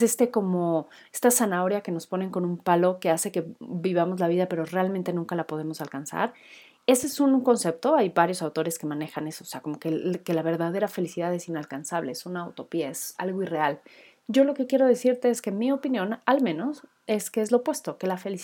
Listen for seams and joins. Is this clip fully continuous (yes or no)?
yes